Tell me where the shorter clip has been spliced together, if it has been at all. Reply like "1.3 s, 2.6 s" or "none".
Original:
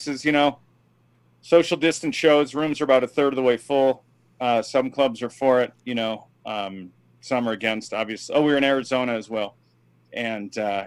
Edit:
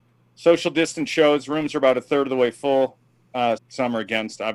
3.6 s